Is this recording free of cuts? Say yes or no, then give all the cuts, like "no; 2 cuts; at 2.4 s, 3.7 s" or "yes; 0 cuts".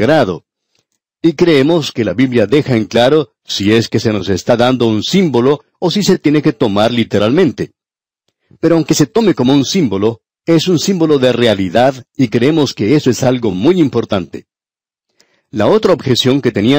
yes; 0 cuts